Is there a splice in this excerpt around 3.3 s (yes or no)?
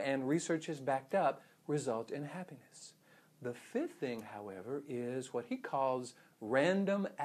no